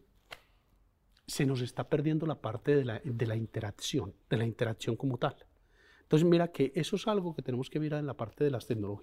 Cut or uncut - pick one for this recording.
cut